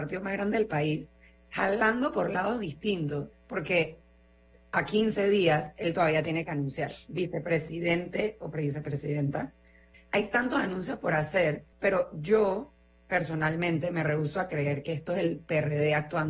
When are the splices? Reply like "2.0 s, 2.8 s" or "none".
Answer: 3.3 s, 9.9 s, 11.7 s